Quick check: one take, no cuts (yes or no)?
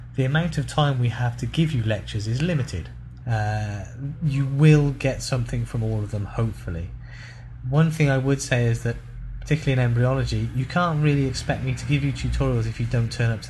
no